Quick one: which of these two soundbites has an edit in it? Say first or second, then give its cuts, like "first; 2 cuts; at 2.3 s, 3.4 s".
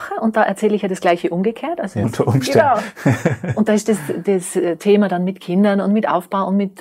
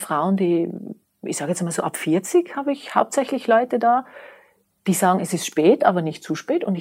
first; 1 cut; at 2.0 s